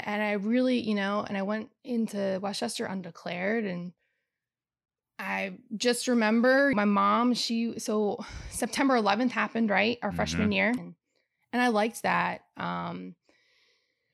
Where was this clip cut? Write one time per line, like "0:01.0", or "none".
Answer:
0:06.7
0:10.8